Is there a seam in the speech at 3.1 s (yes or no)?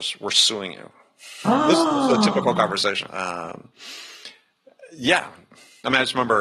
yes